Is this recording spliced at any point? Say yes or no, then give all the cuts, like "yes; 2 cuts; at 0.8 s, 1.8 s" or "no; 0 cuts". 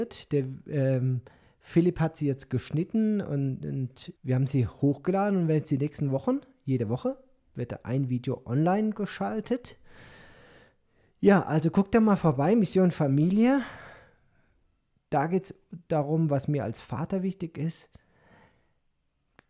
yes; 1 cut; at 4.2 s